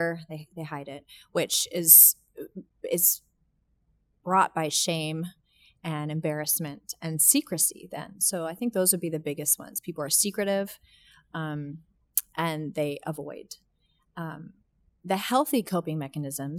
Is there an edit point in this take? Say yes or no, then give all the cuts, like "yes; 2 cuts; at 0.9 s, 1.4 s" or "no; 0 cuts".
no; 0 cuts